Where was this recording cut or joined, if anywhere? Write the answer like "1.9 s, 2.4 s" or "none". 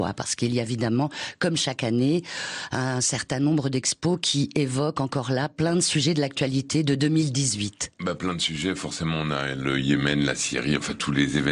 none